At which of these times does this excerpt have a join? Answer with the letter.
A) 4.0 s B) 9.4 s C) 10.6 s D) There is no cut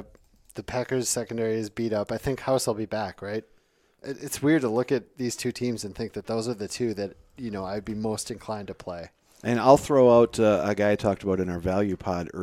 A